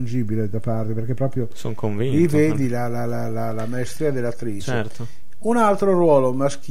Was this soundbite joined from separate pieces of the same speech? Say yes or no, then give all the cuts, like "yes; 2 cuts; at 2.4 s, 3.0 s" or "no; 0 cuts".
no; 0 cuts